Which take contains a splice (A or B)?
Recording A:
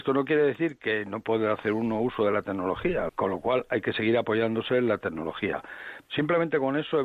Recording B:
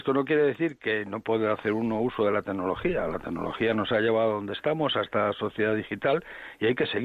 A